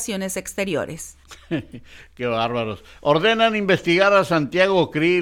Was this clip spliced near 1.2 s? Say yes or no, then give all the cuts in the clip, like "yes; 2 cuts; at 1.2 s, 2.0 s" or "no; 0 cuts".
yes; 1 cut; at 1.2 s